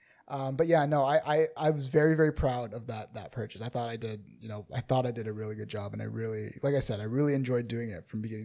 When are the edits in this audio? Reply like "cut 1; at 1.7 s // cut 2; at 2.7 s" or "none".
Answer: cut 1; at 1.6 s